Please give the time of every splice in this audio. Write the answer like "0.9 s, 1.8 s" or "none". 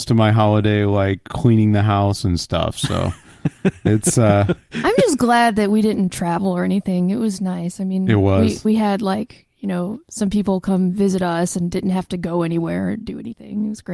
8.6 s